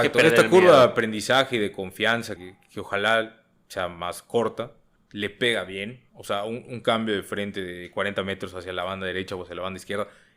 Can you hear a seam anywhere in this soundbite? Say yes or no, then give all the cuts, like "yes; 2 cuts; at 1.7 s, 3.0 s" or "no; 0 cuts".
yes; 3 cuts; at 2.4 s, 5.0 s, 6.1 s